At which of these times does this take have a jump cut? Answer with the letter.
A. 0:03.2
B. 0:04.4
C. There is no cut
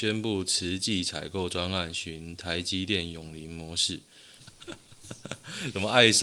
B